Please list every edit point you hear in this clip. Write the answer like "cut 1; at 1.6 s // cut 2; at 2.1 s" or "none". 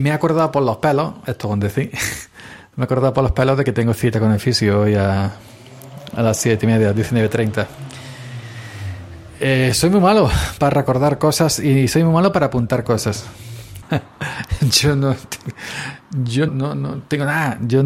cut 1; at 13.8 s // cut 2; at 16.5 s